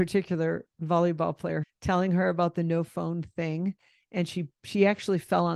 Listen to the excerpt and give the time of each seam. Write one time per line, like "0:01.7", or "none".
0:01.6